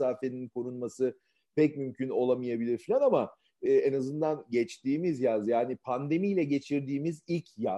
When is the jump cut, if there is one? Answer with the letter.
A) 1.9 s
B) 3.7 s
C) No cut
B